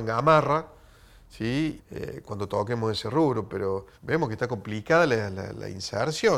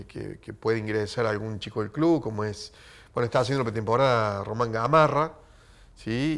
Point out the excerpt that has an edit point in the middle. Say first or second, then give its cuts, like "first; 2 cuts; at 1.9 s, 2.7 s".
first; 2 cuts; at 1.8 s, 3.9 s